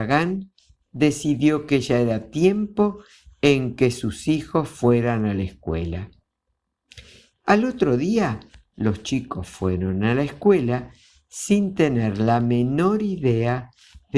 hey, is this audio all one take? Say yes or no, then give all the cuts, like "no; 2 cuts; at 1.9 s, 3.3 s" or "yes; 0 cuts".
no; 1 cut; at 7.3 s